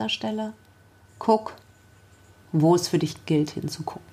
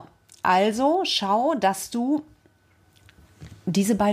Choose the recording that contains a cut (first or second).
first